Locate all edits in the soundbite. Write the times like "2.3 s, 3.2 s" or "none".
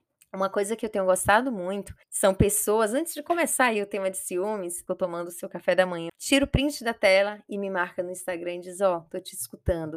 2.0 s, 4.9 s, 6.1 s